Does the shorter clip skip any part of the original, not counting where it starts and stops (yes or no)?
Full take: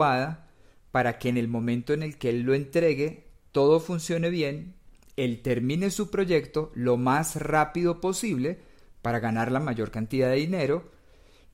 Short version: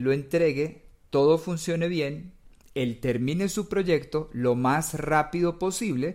no